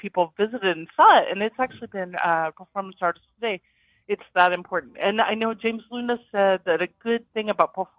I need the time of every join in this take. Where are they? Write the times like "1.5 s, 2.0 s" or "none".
2.5 s